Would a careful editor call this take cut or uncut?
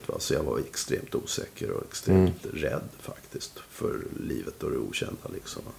uncut